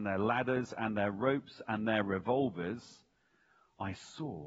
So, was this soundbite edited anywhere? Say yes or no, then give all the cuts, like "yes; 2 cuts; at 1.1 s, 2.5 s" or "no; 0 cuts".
no; 0 cuts